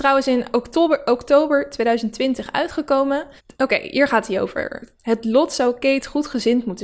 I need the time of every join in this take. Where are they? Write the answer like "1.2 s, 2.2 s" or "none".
3.4 s, 5.0 s